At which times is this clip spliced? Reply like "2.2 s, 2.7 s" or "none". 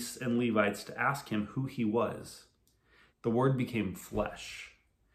3.1 s